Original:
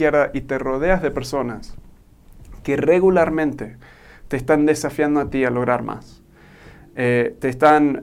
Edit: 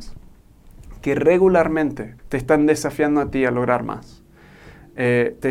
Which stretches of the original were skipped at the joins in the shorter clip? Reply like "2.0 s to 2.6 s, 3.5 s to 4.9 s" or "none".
3.8 s to 4.2 s